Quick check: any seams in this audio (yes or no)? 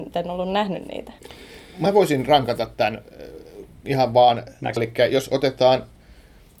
yes